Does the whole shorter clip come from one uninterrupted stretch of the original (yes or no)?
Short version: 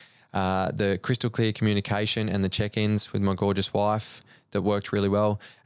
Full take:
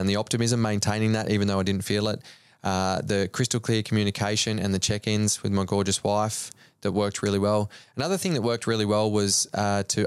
yes